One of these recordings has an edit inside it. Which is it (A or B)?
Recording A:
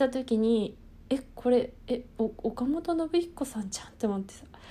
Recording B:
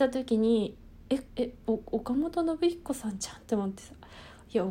B